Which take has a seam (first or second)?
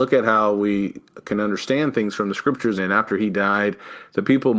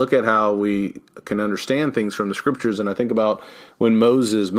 first